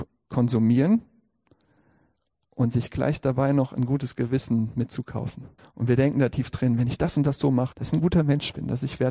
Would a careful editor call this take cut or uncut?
cut